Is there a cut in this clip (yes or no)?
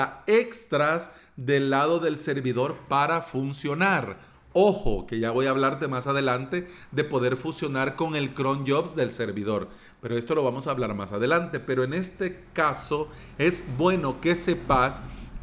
no